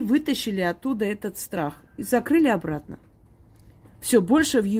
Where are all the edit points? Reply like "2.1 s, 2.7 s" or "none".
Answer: none